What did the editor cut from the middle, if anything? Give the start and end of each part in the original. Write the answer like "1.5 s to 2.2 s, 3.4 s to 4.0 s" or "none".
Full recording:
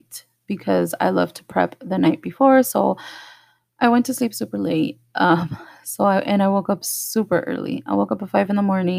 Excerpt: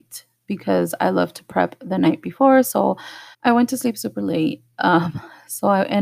3.3 s to 3.7 s